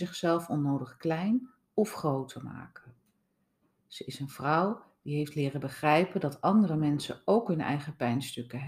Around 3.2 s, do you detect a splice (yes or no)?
no